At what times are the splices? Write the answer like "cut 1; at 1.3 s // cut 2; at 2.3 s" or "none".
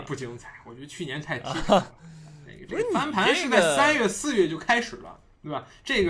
none